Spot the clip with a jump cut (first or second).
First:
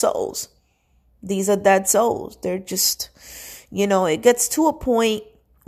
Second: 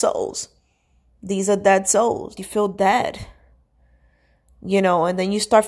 second